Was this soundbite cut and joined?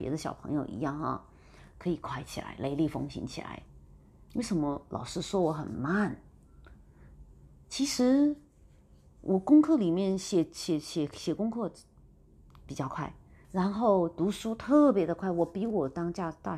yes; 1 cut; at 13.4 s

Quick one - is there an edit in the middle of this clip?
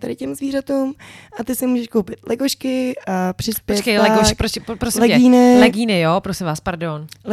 no; 0 cuts

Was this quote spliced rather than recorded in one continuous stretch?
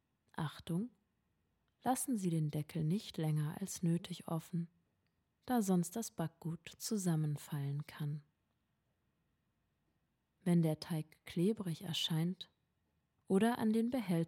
no; 0 cuts

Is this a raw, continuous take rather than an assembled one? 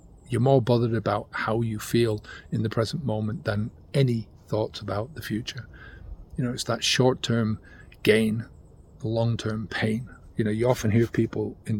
yes; 0 cuts

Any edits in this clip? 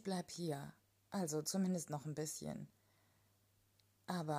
no; 0 cuts

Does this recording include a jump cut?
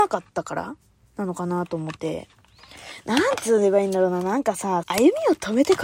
yes; 2 cuts; at 2.0 s, 4.8 s

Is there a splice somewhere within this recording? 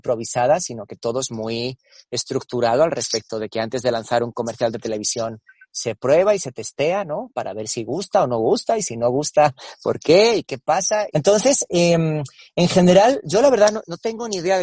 yes; 1 cut; at 11.1 s

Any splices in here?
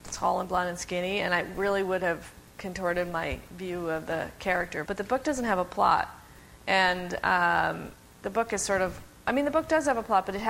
yes; 2 cuts; at 2.5 s, 4.9 s

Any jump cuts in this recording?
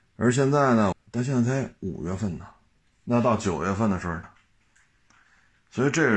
yes; 3 cuts; at 0.9 s, 2.9 s, 4.2 s

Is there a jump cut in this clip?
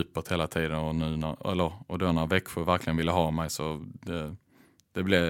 no; 0 cuts

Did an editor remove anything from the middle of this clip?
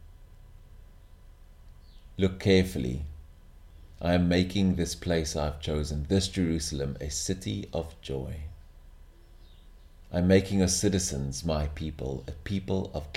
no; 0 cuts

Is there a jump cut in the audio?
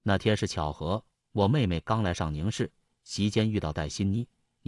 yes; 1 cut; at 2.9 s

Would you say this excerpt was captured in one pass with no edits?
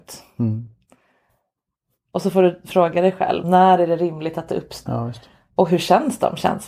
no; 2 cuts; at 3.4 s, 4.9 s

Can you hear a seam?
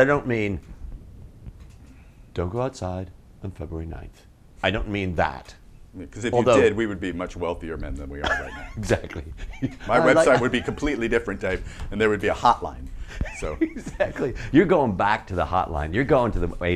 no; 0 cuts

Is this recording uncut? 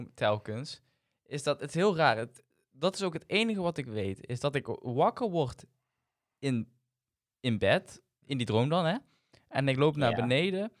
yes; 0 cuts

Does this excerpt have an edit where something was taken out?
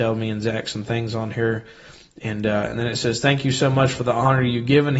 no; 0 cuts

